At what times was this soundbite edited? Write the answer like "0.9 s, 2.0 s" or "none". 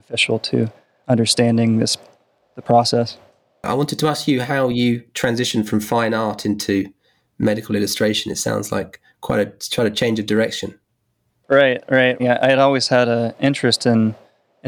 12.2 s